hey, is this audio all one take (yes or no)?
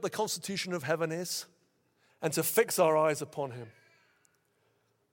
no